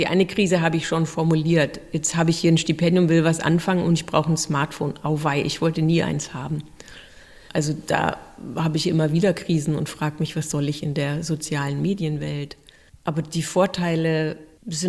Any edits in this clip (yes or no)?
no